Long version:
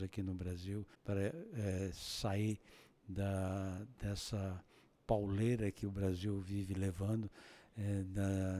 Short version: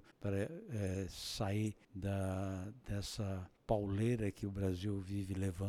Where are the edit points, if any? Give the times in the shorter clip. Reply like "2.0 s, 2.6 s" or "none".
1.8 s, 3.6 s